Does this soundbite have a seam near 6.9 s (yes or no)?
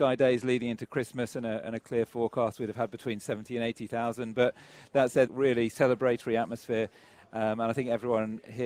no